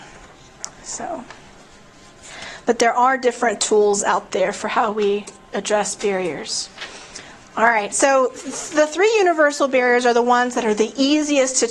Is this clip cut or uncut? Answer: uncut